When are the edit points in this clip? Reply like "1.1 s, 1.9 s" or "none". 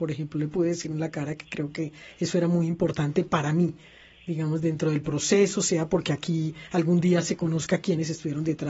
none